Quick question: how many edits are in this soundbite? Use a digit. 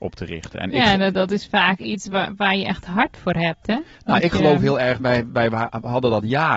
2